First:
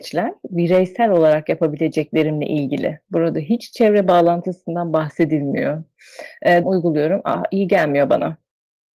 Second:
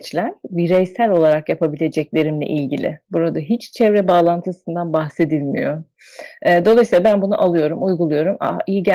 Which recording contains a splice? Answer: first; 1 cut; at 6.6 s

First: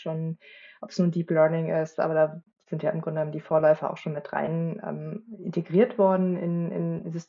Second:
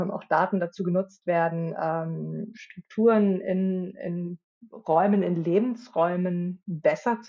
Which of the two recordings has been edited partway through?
second; 1 cut; at 2.5 s

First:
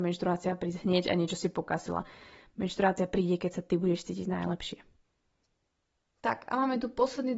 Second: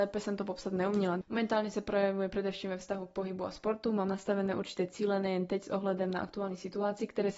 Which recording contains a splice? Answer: second; 1 cut; at 1.2 s

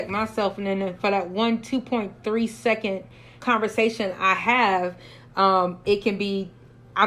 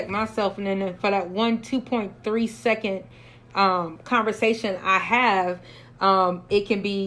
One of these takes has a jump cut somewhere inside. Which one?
first; 1 cut; at 3.4 s

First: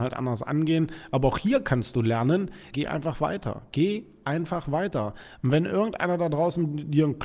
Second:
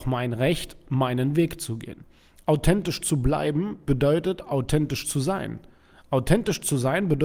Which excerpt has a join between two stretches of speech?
first; 1 cut; at 2.7 s

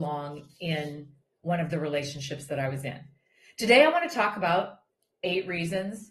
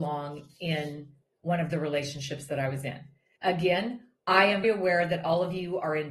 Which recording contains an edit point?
second; 2 cuts; at 3.4 s, 4.6 s

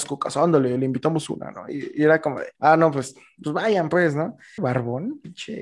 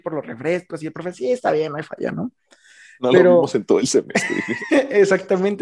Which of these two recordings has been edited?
first; 2 cuts; at 2.5 s, 4.6 s

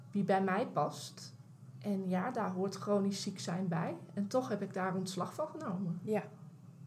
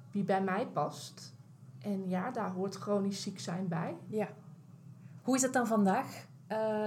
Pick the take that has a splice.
second; 1 cut; at 4.1 s

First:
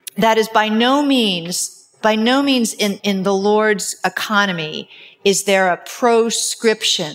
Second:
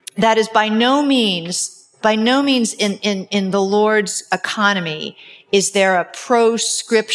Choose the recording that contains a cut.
first; 1 cut; at 3.0 s

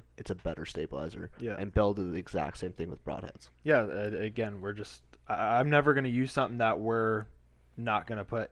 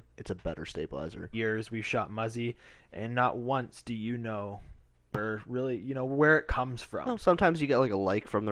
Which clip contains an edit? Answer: second; 1 cut; at 1.3 s

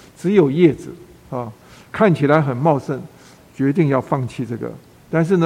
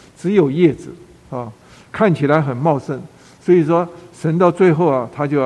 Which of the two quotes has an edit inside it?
first; 1 cut; at 3.4 s

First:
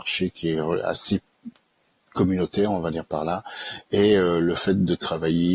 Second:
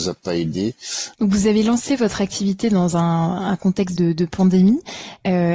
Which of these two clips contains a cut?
second; 2 cuts; at 1.1 s, 3.9 s

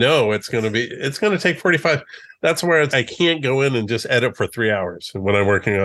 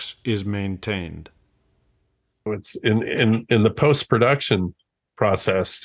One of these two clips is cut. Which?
first; 1 cut; at 2.9 s

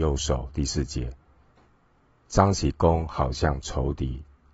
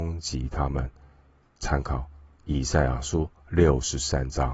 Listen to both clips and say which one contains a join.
second; 1 cut; at 1.4 s

